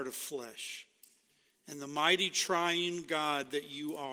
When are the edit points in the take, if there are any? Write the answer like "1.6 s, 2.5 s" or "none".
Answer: none